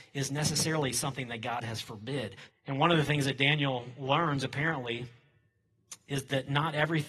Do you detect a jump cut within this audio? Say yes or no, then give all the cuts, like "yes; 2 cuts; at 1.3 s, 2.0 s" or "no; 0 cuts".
yes; 1 cut; at 2.5 s